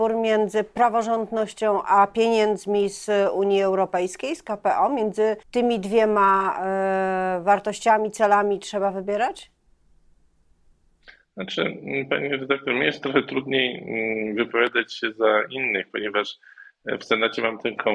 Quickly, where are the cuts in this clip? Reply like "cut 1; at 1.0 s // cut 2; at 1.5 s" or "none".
cut 1; at 5.4 s